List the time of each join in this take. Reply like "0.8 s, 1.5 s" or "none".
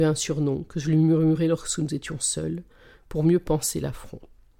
none